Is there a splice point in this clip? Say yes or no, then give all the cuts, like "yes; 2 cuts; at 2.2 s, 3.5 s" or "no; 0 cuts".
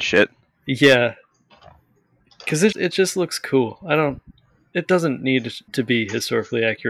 yes; 2 cuts; at 2.7 s, 5.7 s